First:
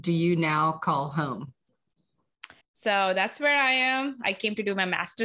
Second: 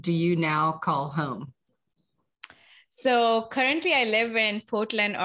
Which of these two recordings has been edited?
first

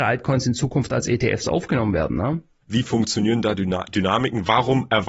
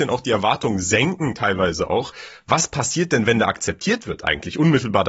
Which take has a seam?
first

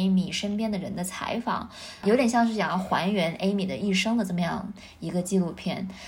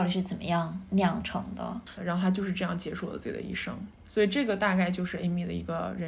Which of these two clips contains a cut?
second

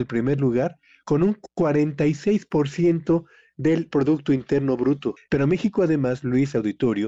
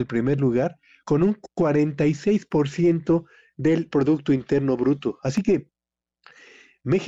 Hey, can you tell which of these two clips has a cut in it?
first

